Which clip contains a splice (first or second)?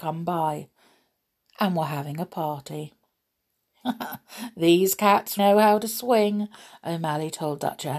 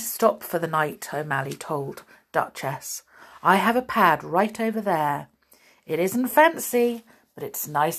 first